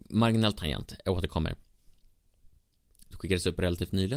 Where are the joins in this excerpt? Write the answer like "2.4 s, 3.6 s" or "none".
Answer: 3.1 s